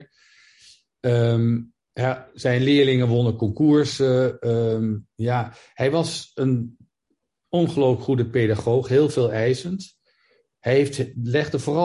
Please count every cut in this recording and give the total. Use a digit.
0